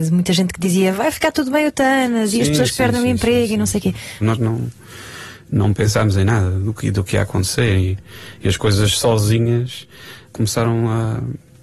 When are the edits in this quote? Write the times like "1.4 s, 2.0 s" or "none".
4.2 s, 10.3 s